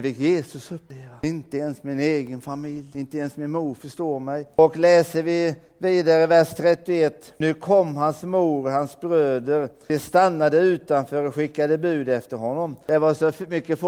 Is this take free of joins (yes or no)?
yes